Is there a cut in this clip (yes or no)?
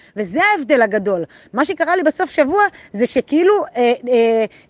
no